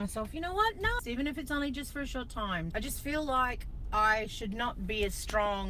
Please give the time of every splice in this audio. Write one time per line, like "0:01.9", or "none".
0:01.0
0:02.7